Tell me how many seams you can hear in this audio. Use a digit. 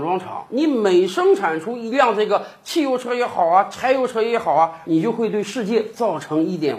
1